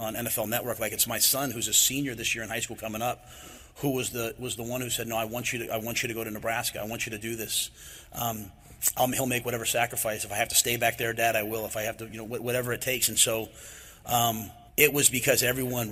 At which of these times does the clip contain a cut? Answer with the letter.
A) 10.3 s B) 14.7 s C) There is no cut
B